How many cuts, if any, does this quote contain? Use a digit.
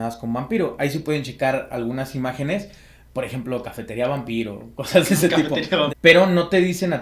1